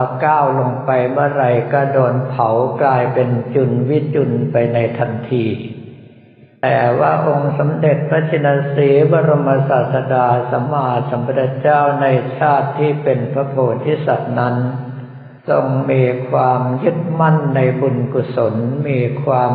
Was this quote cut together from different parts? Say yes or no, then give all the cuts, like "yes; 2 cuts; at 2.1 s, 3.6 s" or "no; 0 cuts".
yes; 2 cuts; at 10.7 s, 15.4 s